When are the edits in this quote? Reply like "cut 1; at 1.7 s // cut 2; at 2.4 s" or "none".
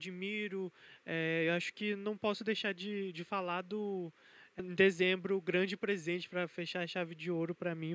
cut 1; at 4.6 s